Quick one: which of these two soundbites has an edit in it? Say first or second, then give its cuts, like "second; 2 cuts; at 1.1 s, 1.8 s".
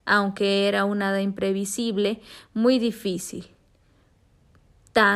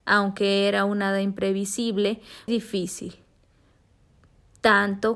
second; 1 cut; at 2.5 s